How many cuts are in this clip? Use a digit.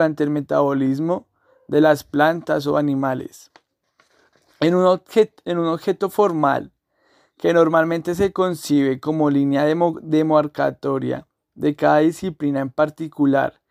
0